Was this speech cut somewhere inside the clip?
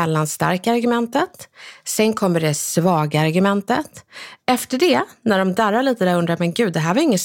no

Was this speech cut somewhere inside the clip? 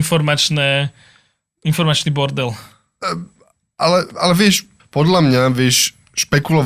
yes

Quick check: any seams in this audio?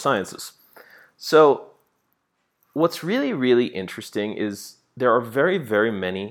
no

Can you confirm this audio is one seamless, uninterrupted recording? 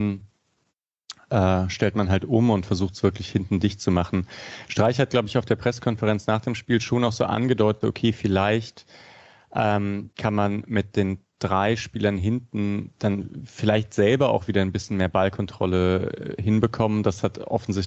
no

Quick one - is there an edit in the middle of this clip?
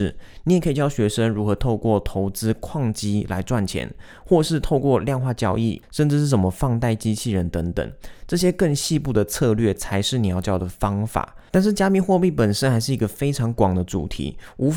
yes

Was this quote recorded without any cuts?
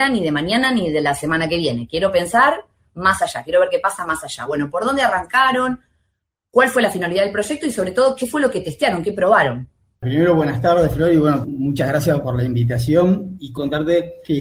yes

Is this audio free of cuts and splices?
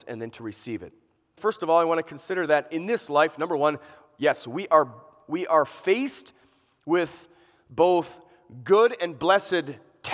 no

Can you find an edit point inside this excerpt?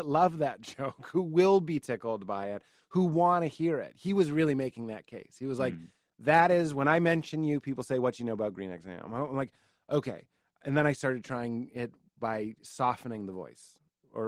no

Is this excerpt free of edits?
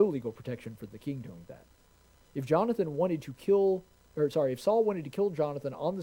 yes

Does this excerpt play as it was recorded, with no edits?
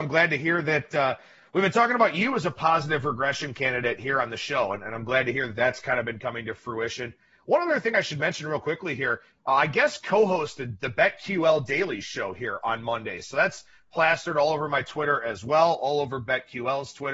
yes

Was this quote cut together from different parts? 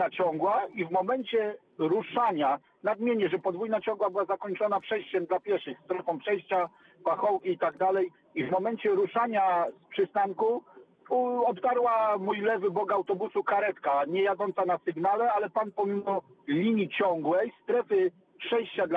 no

